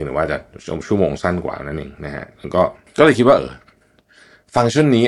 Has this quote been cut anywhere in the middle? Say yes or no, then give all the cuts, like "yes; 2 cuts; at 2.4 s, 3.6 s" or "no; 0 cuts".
yes; 1 cut; at 3.4 s